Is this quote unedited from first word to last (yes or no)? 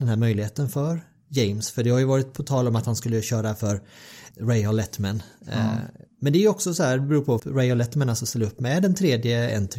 no